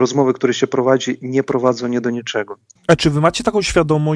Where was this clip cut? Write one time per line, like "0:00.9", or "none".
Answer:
0:02.8